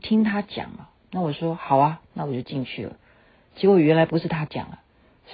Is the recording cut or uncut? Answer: uncut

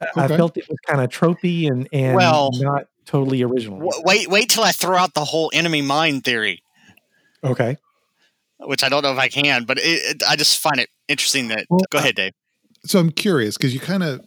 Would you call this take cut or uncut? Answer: cut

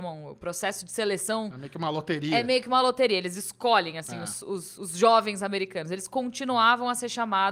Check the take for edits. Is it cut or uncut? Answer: uncut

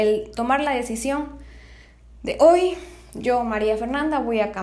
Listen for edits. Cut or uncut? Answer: uncut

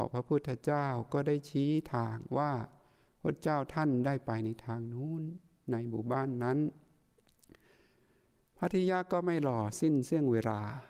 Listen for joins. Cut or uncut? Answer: uncut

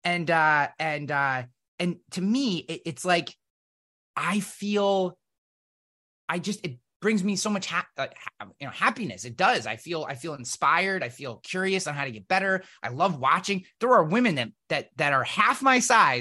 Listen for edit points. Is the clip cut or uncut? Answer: uncut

